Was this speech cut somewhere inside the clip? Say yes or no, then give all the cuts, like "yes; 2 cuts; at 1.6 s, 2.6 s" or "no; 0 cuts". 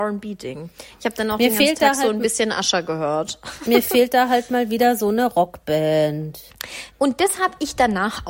no; 0 cuts